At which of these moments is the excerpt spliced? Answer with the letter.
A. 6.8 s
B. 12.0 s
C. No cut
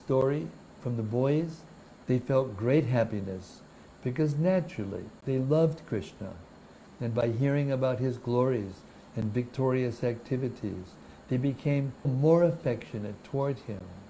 B